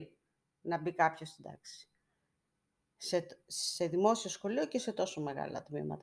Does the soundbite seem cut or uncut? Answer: uncut